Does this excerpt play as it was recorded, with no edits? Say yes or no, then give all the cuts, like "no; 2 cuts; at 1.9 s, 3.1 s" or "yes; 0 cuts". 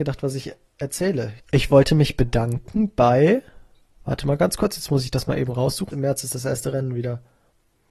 no; 2 cuts; at 1.4 s, 5.9 s